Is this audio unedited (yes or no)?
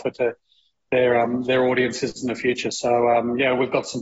yes